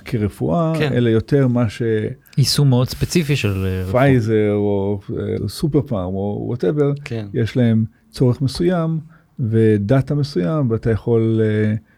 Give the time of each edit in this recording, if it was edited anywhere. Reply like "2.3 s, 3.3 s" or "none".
5.4 s

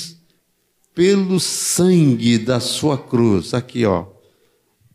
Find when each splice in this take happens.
none

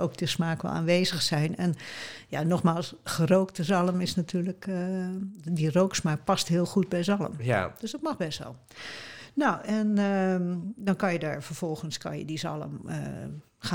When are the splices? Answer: none

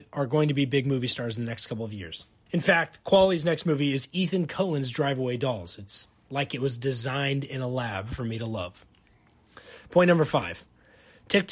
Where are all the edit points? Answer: 2.5 s

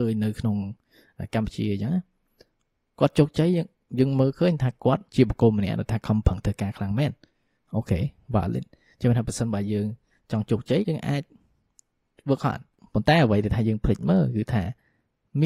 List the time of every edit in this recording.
5.1 s, 10.8 s

